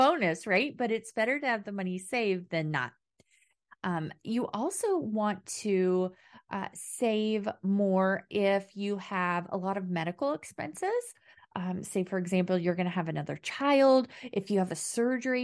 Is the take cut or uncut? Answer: uncut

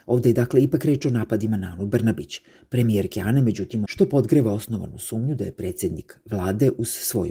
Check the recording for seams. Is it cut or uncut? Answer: cut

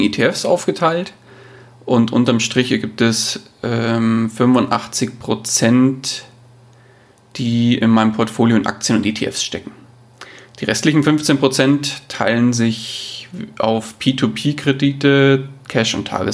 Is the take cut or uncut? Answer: uncut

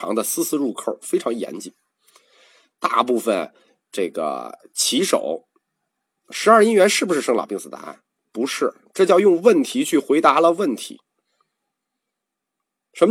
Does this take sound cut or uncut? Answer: cut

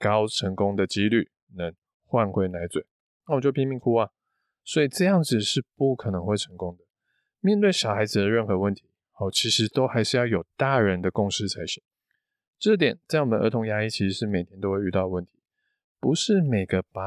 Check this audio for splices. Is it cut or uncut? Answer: uncut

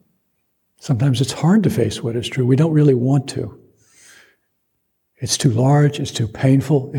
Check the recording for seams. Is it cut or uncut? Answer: uncut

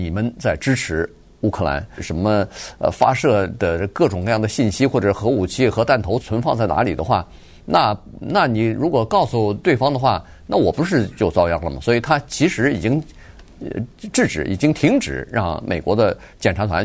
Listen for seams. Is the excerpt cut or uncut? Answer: cut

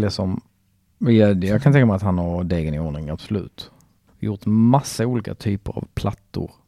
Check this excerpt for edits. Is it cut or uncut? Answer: cut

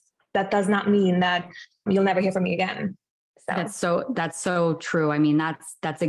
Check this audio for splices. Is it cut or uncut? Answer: uncut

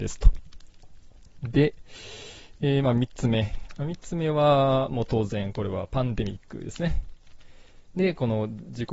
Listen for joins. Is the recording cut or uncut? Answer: cut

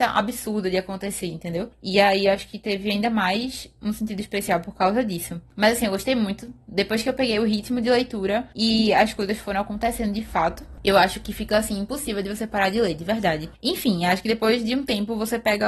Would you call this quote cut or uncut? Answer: uncut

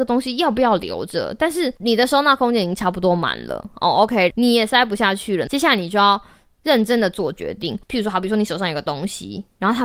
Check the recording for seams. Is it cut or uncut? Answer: cut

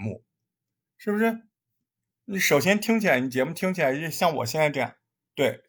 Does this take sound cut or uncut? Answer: uncut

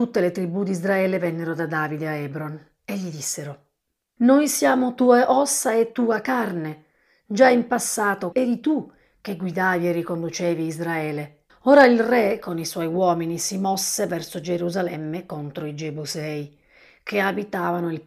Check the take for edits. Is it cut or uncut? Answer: cut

